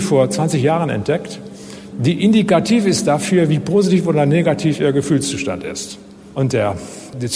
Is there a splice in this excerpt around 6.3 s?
yes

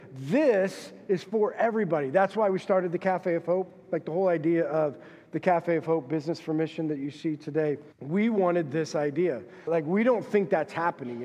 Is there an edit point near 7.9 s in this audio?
yes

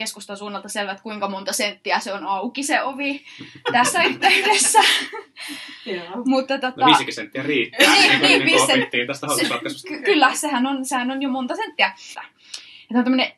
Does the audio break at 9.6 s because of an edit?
no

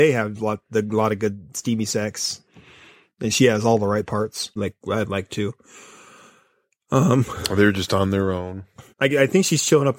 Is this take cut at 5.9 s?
no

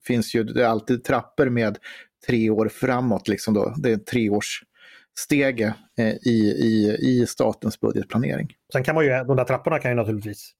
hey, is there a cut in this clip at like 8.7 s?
yes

